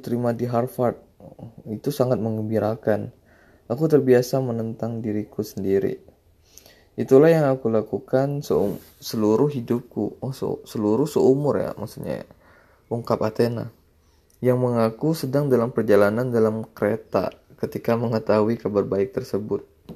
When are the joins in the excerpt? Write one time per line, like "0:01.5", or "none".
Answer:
none